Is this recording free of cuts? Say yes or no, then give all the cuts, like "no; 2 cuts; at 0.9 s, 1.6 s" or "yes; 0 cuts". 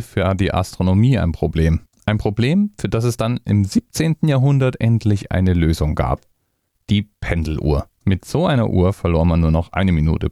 yes; 0 cuts